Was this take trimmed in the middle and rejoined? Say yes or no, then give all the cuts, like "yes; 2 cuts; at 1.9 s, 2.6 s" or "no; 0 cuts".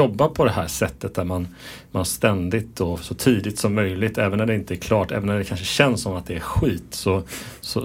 no; 0 cuts